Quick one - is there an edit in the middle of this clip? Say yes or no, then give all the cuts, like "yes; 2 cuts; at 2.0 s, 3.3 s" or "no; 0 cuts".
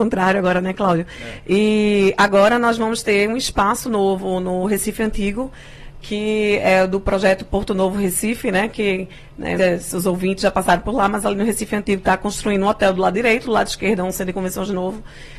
yes; 1 cut; at 9.6 s